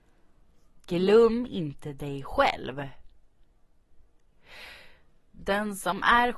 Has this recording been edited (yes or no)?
no